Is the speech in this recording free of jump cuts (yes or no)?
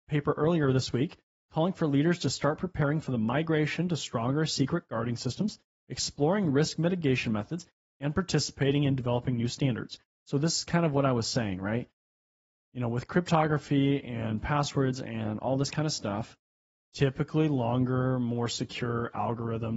yes